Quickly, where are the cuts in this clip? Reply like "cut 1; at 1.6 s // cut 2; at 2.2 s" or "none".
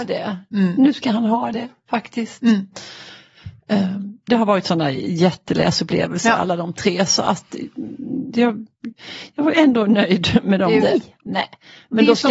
cut 1; at 4.3 s // cut 2; at 10.8 s